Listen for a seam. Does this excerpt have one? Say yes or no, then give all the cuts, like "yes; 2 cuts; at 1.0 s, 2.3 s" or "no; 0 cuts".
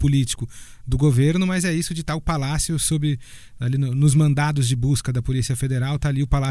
no; 0 cuts